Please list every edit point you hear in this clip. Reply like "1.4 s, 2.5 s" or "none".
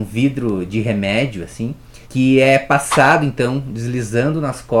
2.0 s